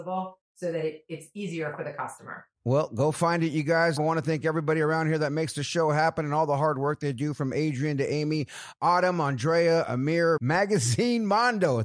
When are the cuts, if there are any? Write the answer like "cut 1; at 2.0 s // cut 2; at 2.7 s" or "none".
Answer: cut 1; at 4.0 s // cut 2; at 10.4 s